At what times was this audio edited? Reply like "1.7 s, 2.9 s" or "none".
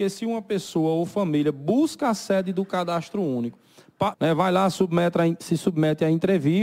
4.1 s